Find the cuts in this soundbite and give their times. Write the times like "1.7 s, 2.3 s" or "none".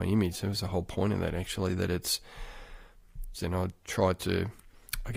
3.3 s